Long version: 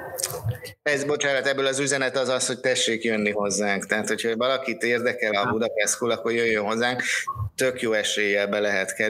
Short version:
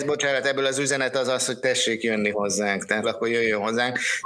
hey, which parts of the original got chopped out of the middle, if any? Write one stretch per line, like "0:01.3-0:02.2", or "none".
0:04.0-0:06.1

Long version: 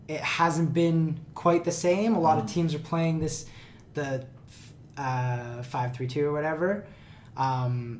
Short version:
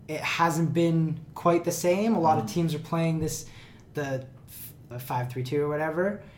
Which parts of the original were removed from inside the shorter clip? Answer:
0:04.9-0:05.5

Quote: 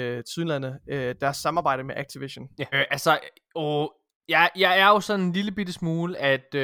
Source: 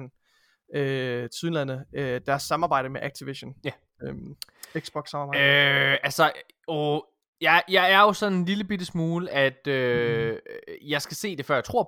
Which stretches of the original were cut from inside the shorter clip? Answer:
0:03.8-0:05.8

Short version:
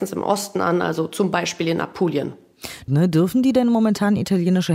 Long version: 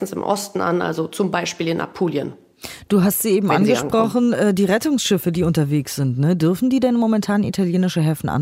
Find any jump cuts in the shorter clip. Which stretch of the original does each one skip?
0:02.9-0:06.2

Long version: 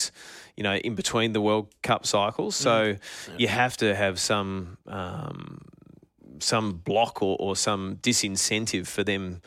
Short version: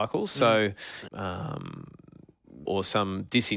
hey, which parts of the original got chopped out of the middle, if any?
0:03.3-0:04.8
0:06.4-0:07.4

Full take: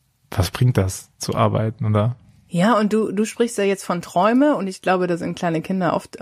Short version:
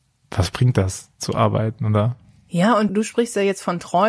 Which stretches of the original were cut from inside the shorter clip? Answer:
0:02.9-0:03.1

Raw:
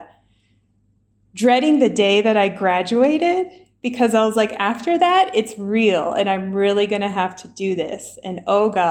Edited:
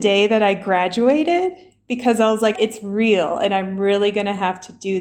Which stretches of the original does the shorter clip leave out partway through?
0:04.5-0:05.3

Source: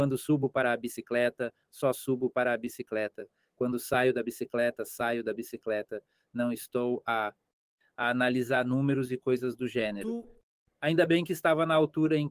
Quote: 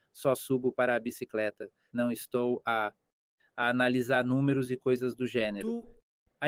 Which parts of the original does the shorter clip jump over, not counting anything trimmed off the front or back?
0:03.5-0:06.3

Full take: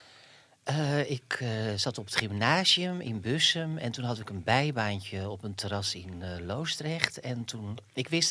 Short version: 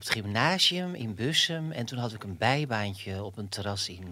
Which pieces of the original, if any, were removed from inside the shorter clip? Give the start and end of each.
none

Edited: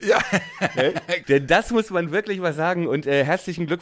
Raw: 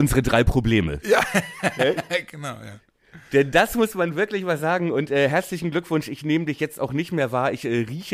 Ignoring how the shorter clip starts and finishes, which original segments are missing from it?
0:02.3-0:03.3

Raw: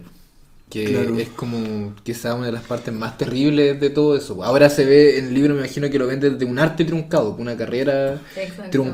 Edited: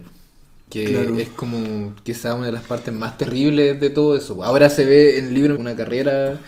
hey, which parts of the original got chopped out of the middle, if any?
0:05.6-0:07.4

